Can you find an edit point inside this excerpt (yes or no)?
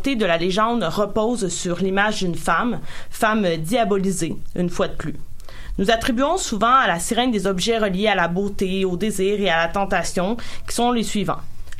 no